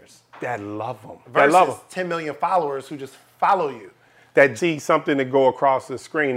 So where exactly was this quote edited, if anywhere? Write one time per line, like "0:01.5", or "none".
0:01.2
0:04.6